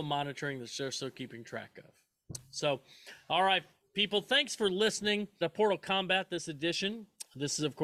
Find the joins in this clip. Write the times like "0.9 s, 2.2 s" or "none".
5.4 s